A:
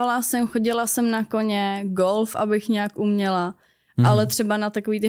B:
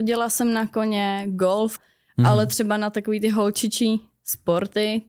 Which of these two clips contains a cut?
B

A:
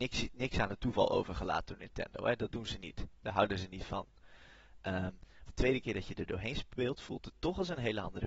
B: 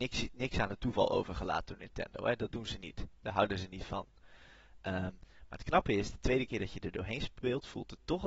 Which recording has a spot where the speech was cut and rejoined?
A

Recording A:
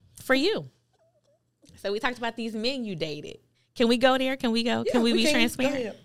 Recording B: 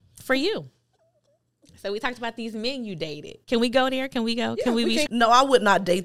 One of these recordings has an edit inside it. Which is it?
B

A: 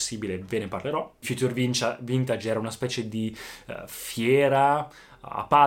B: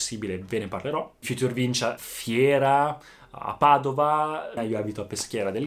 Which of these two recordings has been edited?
B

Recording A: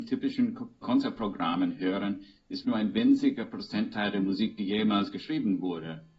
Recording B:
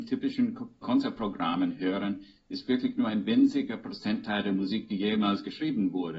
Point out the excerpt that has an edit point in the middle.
A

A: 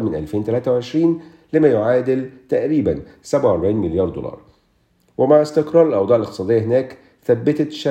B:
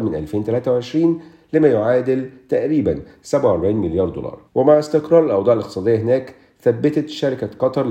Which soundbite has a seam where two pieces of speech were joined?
B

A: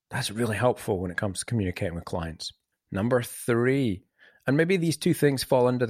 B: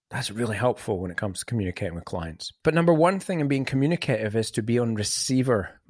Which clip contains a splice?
B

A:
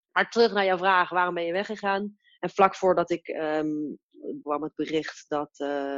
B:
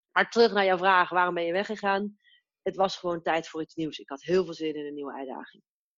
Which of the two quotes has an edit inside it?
A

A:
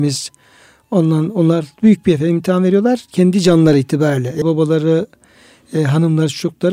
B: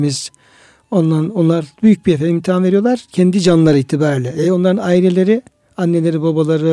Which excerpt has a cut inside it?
A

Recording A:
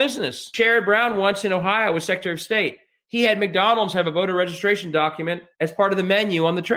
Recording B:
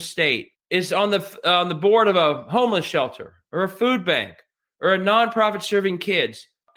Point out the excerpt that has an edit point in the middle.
A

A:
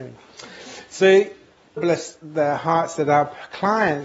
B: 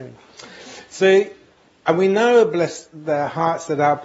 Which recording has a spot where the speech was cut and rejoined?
A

